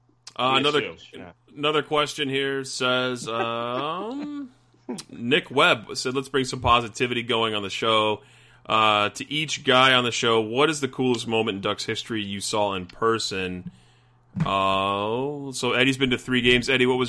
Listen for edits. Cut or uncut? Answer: uncut